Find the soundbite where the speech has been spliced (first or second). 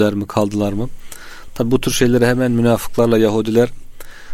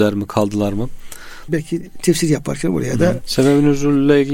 second